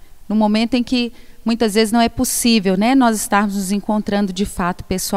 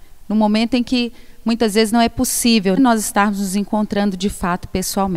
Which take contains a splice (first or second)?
second